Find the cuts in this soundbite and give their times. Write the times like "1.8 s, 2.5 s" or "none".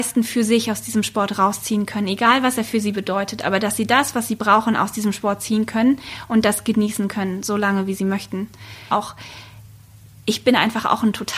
8.9 s